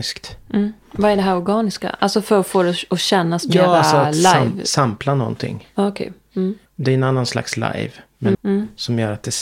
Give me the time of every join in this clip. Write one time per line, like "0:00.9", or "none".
0:08.3